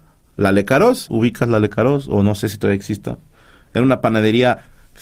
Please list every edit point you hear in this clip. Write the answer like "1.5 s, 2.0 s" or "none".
1.1 s